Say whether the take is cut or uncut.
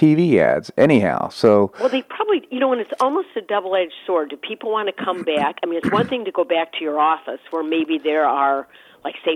uncut